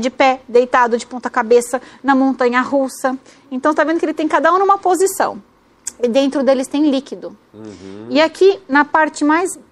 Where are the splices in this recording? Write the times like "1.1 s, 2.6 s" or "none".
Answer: none